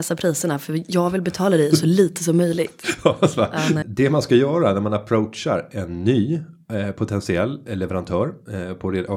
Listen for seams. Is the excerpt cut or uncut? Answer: cut